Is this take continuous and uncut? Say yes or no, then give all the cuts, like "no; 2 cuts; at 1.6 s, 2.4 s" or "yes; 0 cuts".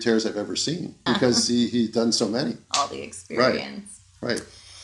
no; 1 cut; at 1.1 s